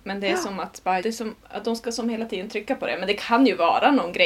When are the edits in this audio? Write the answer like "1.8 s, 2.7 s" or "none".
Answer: 1.0 s